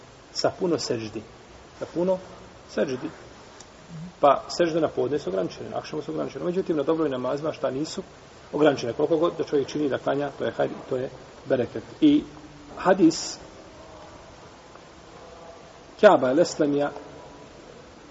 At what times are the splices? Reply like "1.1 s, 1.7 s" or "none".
5.7 s, 12.0 s

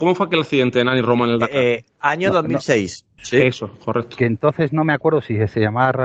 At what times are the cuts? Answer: 3.2 s

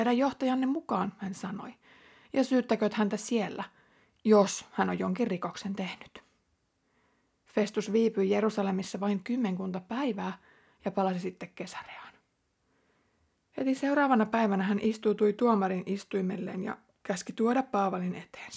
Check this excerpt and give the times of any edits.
none

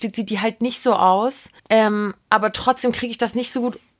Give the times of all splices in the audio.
1.6 s

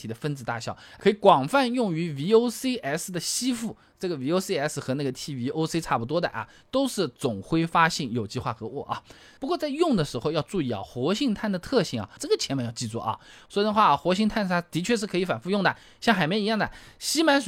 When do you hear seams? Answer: 9.4 s, 12.2 s, 13.5 s

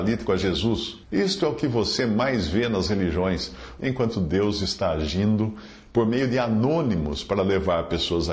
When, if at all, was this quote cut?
1.0 s, 3.8 s

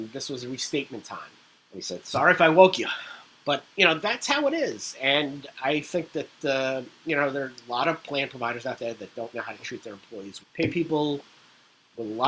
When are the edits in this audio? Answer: 1.6 s, 9.3 s, 10.4 s

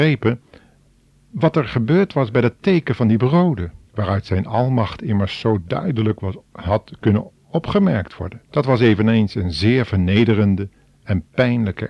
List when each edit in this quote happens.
3.9 s, 8.5 s

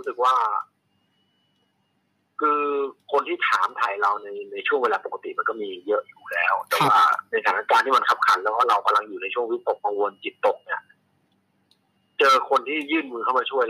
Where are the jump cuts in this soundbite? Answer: 9.8 s

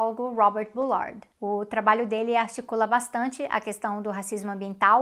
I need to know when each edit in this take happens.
1.3 s

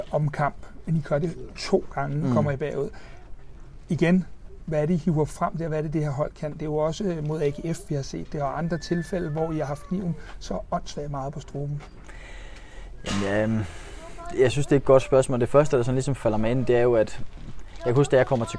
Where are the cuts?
none

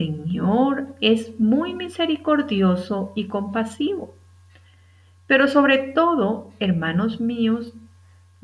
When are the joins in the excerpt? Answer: none

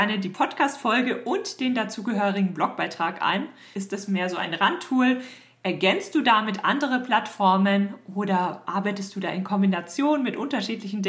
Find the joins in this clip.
3.7 s

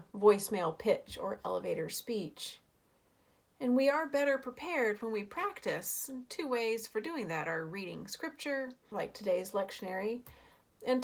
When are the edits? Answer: 8.9 s

